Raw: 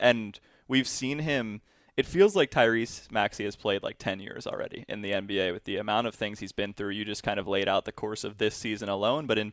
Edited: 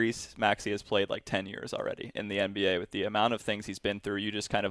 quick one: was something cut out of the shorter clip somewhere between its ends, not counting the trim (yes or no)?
no